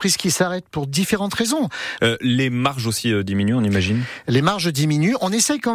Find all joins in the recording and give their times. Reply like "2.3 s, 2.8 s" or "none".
2.0 s